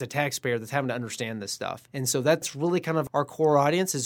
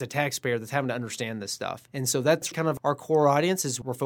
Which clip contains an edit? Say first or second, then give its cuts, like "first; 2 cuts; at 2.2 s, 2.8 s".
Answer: second; 1 cut; at 2.5 s